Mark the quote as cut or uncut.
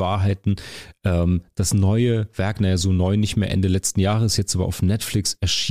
uncut